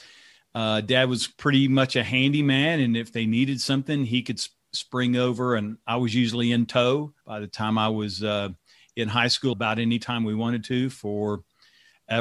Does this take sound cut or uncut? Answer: cut